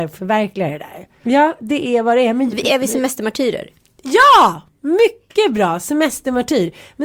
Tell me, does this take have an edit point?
yes; 1 cut; at 1.2 s

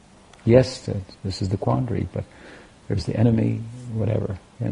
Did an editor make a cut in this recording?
no; 0 cuts

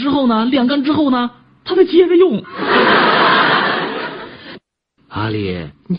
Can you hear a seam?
yes; 1 cut; at 5.0 s

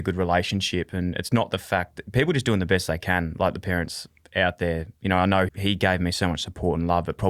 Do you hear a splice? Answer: yes; 1 cut; at 5.5 s

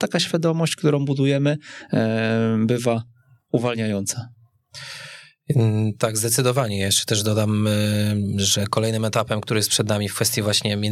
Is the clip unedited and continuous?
yes; 0 cuts

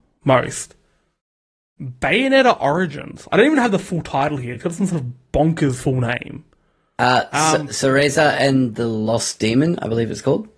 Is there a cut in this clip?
no; 0 cuts

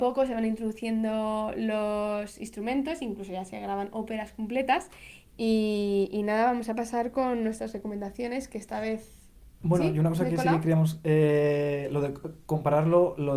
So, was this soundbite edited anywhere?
yes; 1 cut; at 5.3 s

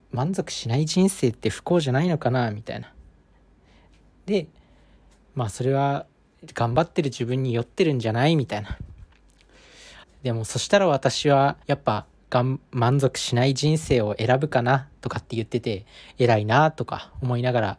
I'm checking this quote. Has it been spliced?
yes; 2 cuts; at 10.0 s, 11.6 s

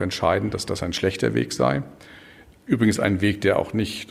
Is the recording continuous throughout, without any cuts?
yes; 0 cuts

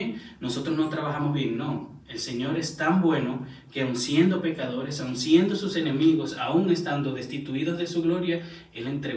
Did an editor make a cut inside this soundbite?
no; 0 cuts

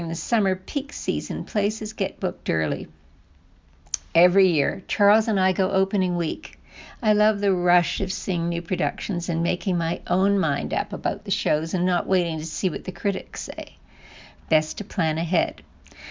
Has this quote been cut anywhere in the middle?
yes; 1 cut; at 14.4 s

